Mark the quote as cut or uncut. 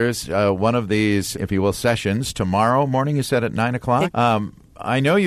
cut